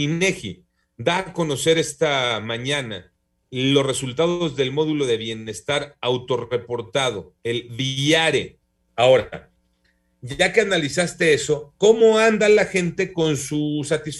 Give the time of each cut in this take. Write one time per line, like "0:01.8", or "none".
0:07.4
0:08.9

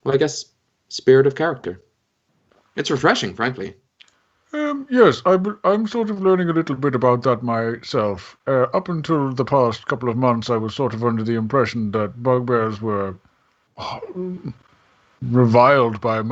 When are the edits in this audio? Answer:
none

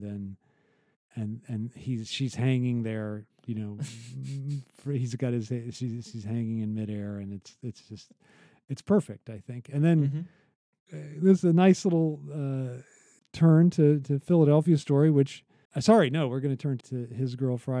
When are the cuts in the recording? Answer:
0:13.2
0:15.7
0:16.8

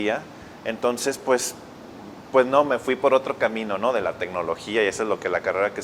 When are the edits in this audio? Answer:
none

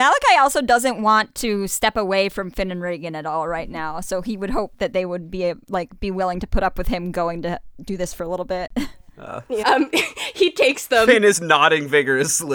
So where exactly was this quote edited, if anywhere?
0:09.6

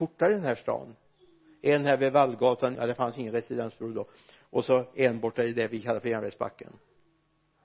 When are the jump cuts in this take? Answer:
0:02.8

